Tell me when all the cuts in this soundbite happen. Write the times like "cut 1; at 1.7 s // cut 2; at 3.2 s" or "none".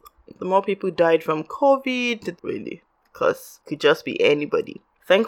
cut 1; at 2.4 s